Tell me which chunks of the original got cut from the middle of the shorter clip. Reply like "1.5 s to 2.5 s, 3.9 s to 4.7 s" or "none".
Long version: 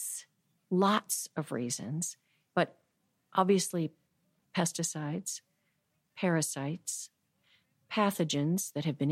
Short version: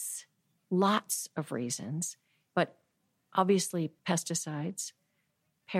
4.0 s to 4.5 s